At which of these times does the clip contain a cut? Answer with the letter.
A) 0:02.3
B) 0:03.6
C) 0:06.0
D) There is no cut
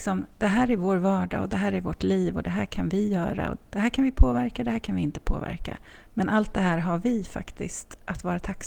B